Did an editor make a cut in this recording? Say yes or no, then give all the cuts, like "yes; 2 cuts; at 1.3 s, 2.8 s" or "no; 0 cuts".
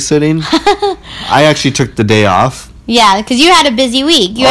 no; 0 cuts